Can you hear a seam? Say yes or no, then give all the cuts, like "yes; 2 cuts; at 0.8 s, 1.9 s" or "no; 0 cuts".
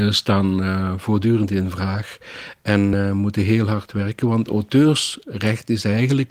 no; 0 cuts